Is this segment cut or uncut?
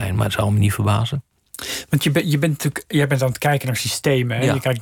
uncut